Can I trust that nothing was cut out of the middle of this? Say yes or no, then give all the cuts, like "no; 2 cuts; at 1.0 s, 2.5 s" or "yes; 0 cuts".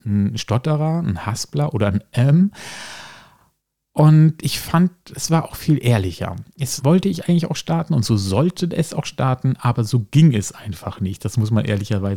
no; 1 cut; at 6.8 s